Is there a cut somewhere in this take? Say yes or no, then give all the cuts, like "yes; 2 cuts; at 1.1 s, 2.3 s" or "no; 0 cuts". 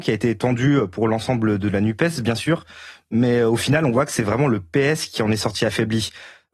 no; 0 cuts